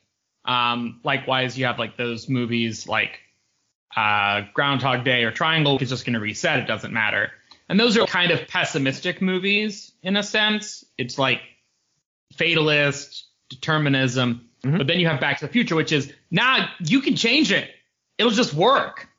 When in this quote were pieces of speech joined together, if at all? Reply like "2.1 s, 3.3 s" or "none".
5.8 s, 8.0 s